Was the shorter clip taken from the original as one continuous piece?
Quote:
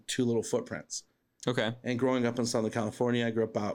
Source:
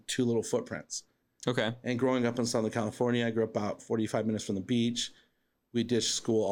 yes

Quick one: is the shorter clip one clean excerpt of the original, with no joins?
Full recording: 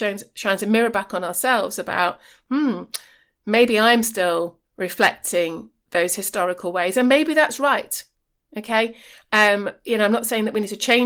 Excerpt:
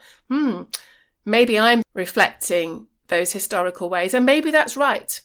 no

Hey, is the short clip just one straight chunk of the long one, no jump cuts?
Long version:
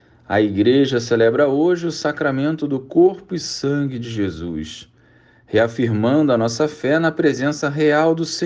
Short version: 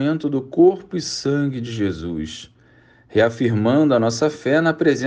yes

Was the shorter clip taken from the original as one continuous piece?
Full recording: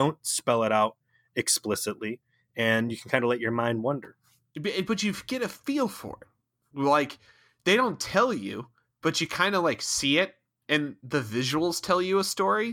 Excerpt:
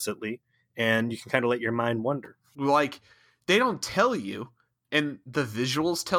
no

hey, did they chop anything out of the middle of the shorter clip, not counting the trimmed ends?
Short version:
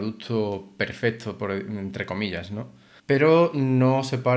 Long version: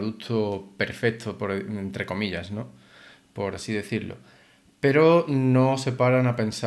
yes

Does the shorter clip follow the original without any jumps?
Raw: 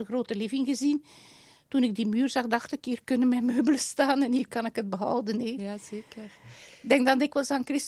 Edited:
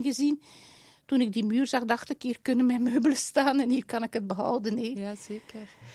yes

